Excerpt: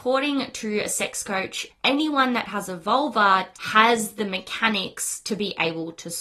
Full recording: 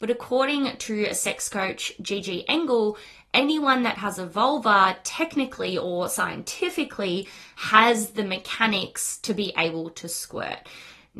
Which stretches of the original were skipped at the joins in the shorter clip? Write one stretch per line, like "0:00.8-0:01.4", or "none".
0:02.0-0:03.2
0:05.0-0:07.5